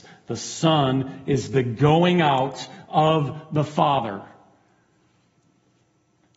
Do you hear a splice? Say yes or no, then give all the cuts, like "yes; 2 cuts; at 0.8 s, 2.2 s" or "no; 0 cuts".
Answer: no; 0 cuts